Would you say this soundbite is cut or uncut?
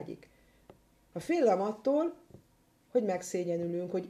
cut